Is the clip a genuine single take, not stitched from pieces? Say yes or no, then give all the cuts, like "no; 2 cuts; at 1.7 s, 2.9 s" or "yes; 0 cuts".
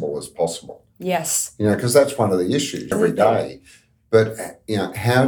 no; 1 cut; at 2.9 s